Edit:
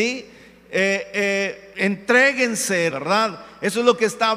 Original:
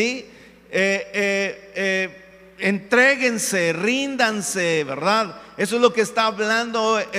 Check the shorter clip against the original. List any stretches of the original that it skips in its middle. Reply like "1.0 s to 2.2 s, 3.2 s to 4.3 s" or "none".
1.7 s to 2.6 s, 3.7 s to 4.9 s